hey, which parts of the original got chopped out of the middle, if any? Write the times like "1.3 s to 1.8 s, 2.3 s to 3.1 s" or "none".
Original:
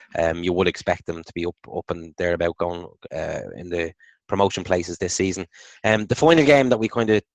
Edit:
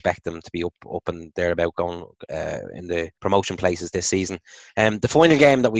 4.0 s to 4.2 s